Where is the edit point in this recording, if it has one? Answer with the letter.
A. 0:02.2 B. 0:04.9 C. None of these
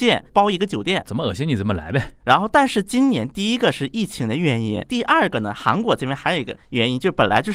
A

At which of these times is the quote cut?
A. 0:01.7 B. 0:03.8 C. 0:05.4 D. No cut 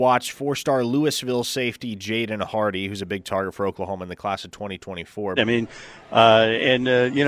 C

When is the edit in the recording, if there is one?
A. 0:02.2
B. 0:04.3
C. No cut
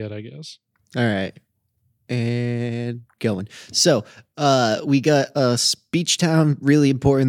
C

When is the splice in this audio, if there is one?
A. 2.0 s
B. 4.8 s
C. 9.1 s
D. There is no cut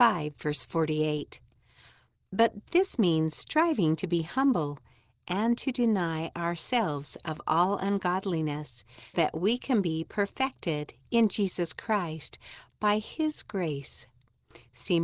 C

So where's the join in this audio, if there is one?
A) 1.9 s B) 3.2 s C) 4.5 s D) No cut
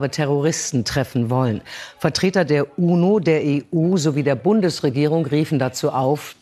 D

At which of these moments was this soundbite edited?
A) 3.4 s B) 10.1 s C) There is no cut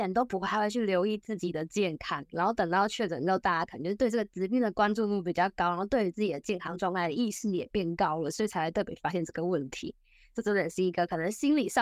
C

